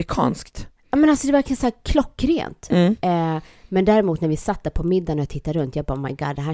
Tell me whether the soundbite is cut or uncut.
uncut